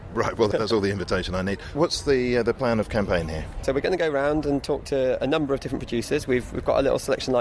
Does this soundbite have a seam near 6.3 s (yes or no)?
no